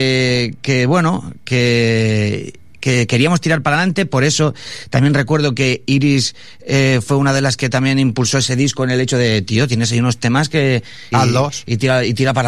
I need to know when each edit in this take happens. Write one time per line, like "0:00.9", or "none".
0:11.1